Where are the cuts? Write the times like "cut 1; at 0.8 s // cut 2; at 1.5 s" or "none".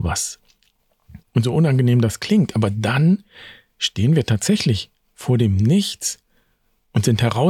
cut 1; at 1.2 s